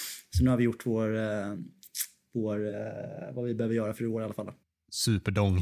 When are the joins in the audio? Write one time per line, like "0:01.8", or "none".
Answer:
none